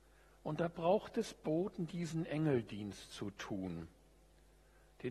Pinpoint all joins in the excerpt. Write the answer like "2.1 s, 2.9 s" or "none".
1.9 s